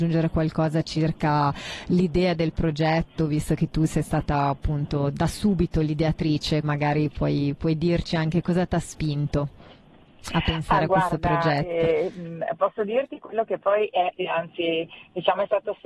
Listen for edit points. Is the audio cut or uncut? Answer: cut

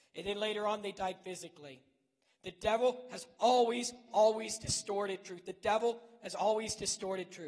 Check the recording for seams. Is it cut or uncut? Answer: cut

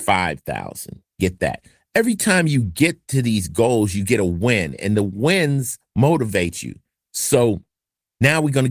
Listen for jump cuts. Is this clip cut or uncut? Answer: cut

